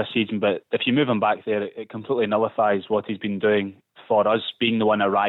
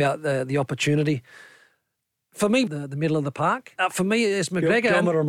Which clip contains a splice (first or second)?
second